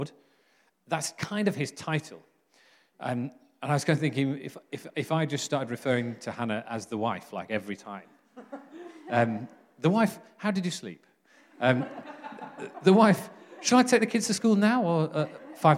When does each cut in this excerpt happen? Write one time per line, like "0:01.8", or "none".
none